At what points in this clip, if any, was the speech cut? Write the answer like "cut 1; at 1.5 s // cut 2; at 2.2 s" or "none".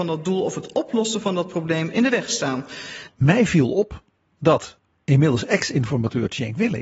cut 1; at 3.1 s